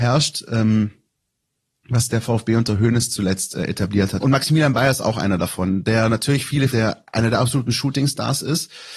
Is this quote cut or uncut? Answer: cut